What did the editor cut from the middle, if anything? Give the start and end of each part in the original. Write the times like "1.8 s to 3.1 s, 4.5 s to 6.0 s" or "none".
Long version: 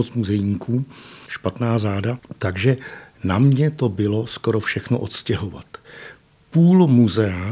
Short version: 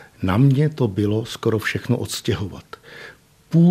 none

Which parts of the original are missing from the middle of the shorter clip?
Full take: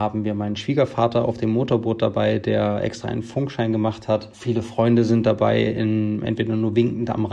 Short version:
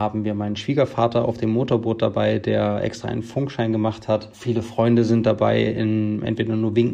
none

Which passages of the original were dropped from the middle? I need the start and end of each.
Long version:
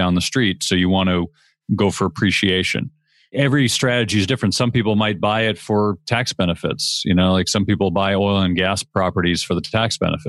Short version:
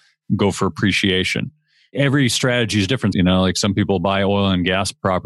4.5 s to 7.0 s

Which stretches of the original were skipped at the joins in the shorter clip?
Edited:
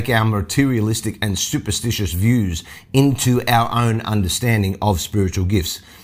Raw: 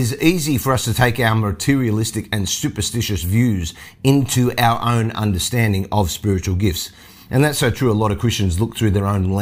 none

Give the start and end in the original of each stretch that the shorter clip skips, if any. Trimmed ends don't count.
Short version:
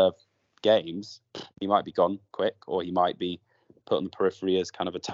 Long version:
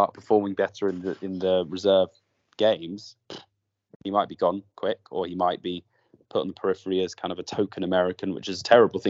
3.5 s to 3.9 s

